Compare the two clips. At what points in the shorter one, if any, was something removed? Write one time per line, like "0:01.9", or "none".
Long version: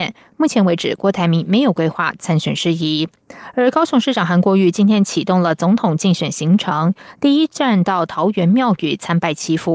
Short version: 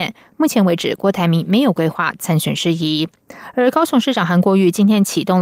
none